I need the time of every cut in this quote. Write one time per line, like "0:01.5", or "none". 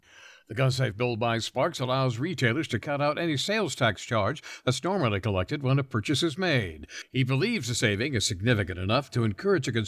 none